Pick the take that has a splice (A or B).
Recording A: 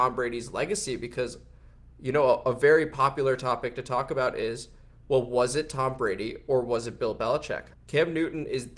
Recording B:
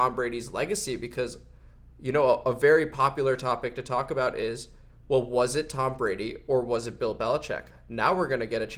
A